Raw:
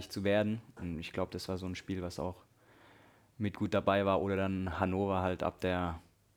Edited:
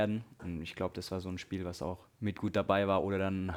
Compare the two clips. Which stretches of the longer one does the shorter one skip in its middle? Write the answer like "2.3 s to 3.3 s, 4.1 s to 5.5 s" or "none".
2.5 s to 3.3 s